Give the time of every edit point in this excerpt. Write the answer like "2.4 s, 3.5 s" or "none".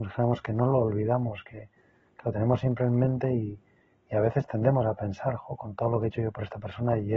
none